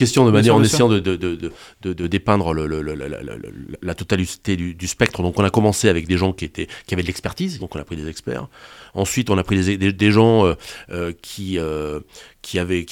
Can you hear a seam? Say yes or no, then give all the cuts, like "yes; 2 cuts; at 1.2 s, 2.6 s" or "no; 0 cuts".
yes; 1 cut; at 7.6 s